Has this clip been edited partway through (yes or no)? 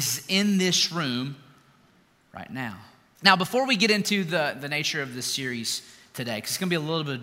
yes